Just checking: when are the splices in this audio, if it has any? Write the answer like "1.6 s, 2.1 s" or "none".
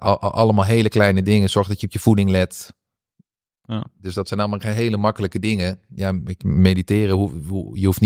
none